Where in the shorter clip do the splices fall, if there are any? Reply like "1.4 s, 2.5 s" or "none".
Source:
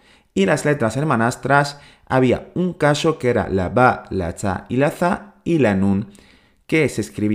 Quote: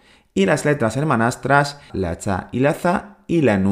1.9 s